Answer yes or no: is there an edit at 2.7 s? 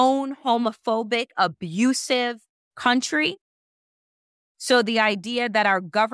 no